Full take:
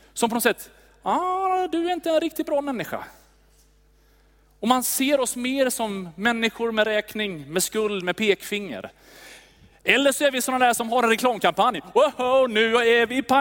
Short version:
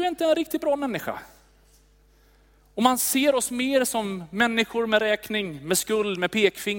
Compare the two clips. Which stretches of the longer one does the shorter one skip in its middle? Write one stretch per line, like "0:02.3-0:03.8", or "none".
none

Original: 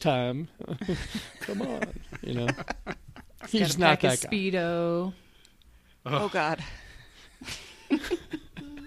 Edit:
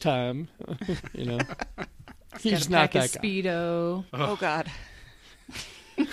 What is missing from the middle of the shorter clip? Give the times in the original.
0:01.0-0:02.1
0:05.2-0:06.0

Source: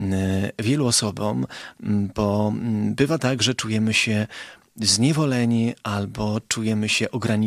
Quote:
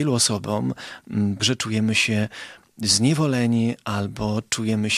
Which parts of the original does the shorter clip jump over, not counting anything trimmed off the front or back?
0:02.1-0:03.4

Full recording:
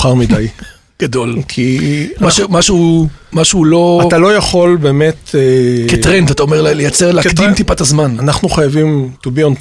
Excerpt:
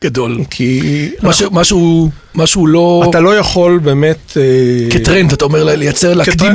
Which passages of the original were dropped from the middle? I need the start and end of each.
none

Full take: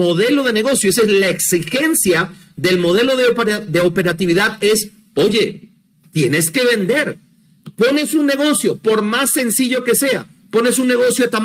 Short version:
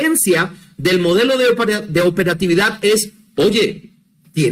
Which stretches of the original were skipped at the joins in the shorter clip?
none

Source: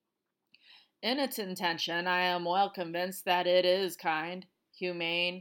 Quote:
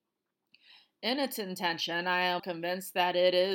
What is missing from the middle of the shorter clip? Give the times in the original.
0:02.4-0:02.7

